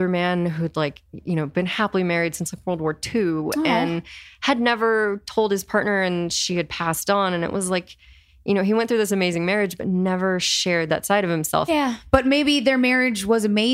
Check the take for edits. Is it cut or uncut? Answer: cut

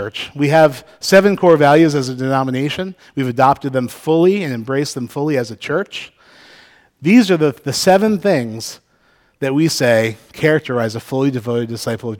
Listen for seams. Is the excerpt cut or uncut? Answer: uncut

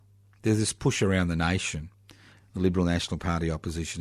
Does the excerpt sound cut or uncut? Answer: cut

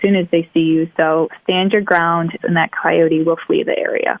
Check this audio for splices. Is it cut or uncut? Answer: cut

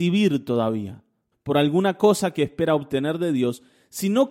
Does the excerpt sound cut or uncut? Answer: cut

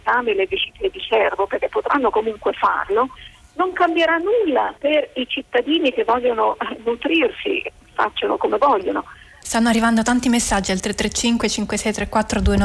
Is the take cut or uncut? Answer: cut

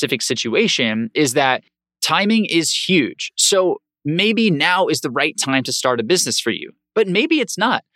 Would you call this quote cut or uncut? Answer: uncut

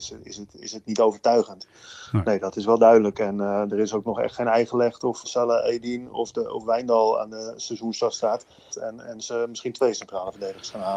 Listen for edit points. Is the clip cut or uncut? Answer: cut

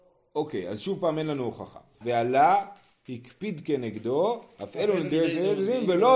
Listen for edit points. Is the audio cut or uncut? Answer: cut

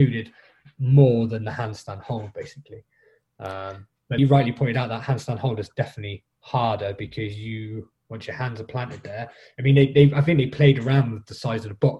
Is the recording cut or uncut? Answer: cut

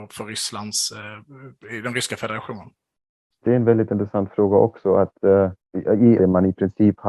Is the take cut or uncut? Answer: cut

